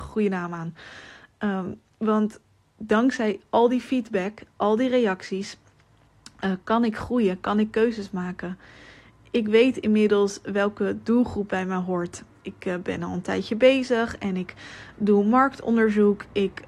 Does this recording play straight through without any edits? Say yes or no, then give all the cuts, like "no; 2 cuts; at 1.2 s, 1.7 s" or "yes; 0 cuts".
yes; 0 cuts